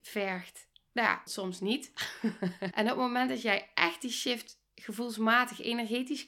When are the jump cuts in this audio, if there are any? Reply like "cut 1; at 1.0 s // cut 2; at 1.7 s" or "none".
cut 1; at 1.3 s // cut 2; at 2.7 s